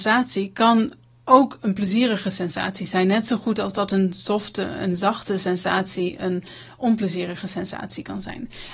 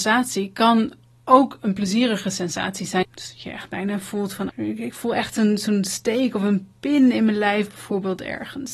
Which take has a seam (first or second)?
second